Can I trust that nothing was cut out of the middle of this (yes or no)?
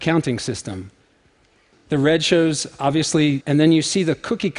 no